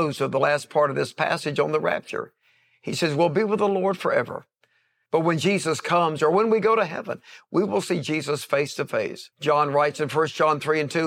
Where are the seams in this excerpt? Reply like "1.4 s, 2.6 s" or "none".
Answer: 5.1 s, 9.3 s

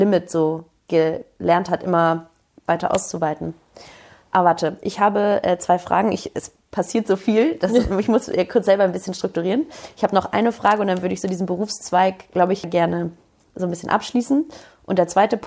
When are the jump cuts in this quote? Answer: none

